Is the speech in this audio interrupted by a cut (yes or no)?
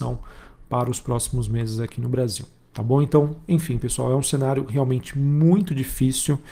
no